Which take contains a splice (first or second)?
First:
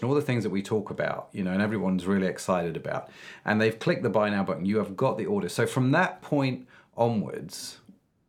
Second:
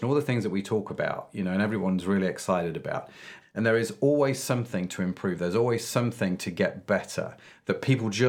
second